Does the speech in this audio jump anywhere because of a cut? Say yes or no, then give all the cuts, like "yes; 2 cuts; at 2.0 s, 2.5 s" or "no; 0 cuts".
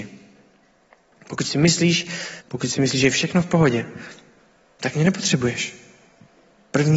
yes; 1 cut; at 2.4 s